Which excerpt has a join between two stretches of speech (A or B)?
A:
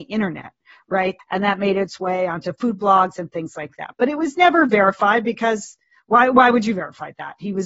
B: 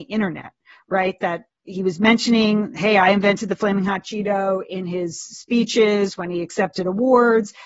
A